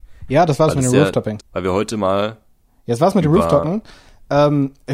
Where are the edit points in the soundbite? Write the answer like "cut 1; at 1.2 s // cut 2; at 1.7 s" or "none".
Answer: cut 1; at 1.4 s